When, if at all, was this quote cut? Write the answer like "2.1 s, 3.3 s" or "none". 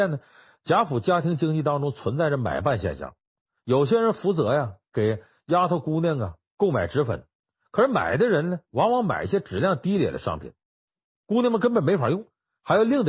none